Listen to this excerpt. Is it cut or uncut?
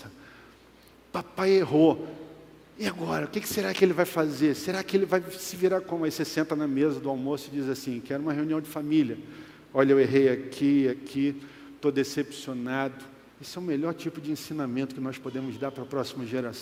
cut